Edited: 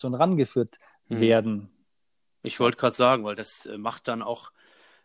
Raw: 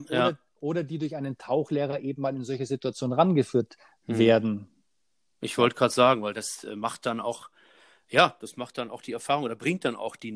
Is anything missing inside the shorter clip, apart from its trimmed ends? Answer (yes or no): no